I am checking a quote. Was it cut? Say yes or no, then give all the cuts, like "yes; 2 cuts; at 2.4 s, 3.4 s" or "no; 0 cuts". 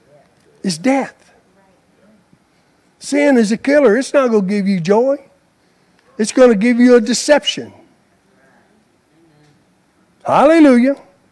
no; 0 cuts